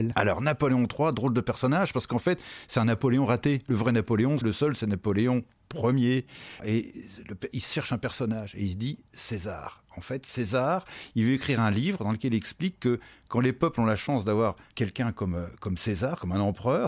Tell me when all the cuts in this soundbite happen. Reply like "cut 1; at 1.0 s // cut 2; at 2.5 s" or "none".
cut 1; at 4.4 s // cut 2; at 6.6 s